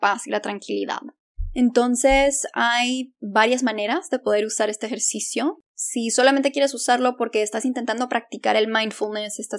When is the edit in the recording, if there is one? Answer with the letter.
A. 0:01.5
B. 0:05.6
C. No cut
B